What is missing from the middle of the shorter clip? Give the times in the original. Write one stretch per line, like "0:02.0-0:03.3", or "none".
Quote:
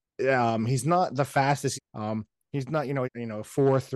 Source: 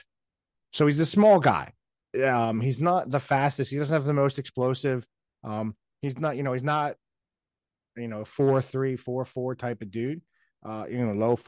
0:03.7-0:05.2
0:06.5-0:07.9